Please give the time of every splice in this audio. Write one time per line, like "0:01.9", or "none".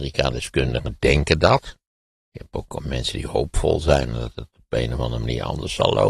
none